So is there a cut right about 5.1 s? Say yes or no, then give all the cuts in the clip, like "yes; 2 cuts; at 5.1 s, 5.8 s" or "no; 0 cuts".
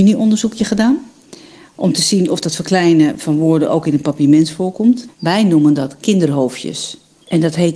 yes; 1 cut; at 5.1 s